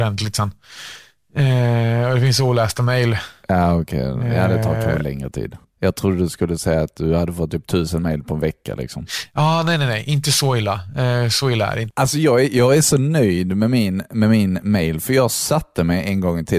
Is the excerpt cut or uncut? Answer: uncut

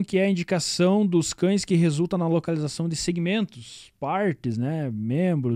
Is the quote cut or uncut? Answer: uncut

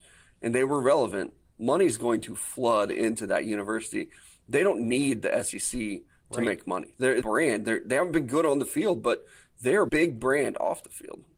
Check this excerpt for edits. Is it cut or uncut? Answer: cut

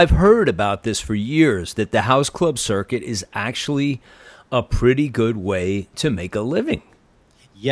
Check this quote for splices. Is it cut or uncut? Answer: uncut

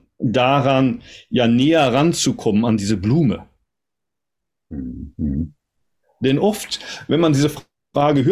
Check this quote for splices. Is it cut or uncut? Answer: cut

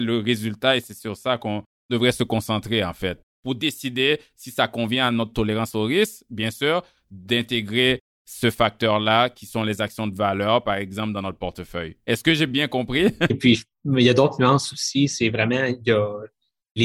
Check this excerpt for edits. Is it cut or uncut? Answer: cut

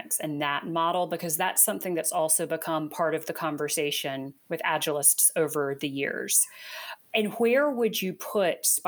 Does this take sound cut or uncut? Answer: uncut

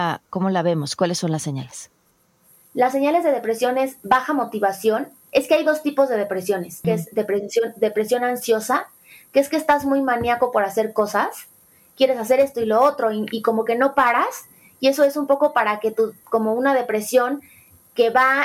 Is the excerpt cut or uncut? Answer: cut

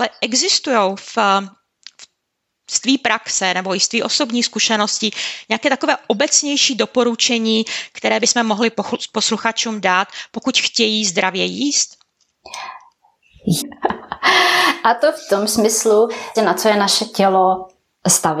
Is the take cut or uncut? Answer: cut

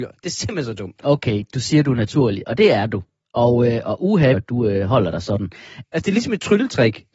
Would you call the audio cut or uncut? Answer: cut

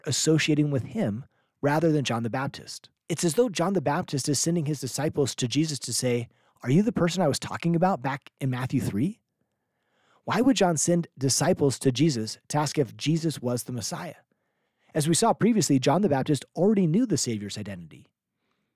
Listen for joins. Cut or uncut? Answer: cut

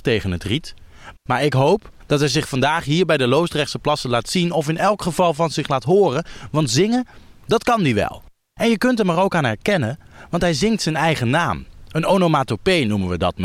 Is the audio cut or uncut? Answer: cut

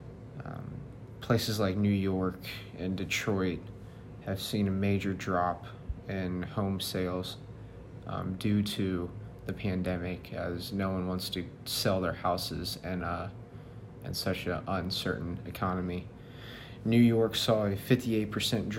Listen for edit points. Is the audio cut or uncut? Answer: uncut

